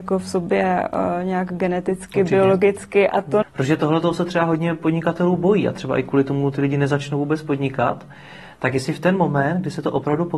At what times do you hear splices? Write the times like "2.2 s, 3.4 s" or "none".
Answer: 3.4 s